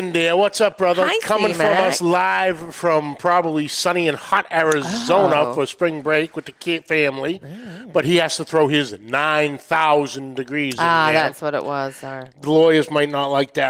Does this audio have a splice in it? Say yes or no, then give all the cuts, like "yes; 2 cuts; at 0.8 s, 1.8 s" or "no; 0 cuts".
no; 0 cuts